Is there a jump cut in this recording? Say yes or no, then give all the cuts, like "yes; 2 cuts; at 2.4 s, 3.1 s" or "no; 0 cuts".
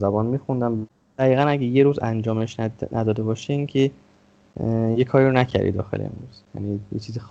no; 0 cuts